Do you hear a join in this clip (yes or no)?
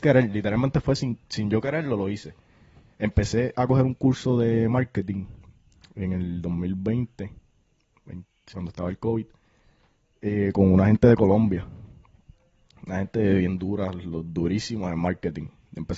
yes